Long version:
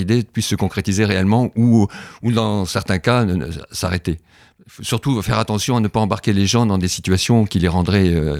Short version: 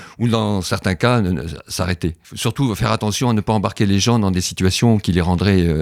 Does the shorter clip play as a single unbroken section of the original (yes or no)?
no